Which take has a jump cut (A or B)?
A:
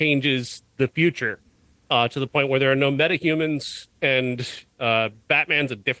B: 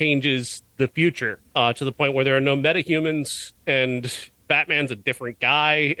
B